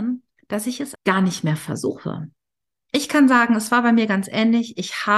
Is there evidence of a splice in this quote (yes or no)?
yes